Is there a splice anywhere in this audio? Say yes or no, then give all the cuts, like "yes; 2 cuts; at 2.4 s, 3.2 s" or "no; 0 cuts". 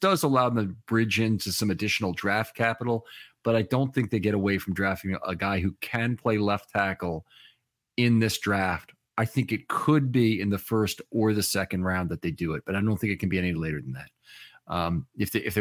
no; 0 cuts